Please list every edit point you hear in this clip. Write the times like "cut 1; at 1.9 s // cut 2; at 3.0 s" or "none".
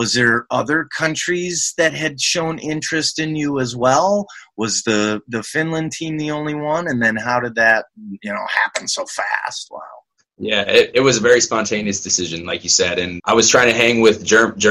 cut 1; at 13.2 s